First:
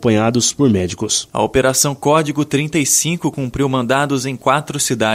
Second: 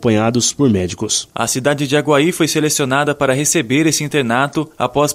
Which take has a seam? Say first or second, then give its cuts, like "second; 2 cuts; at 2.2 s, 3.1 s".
first; 1 cut; at 1.3 s